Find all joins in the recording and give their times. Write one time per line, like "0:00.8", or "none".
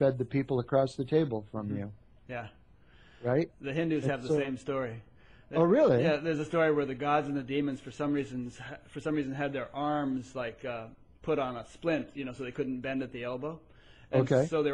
none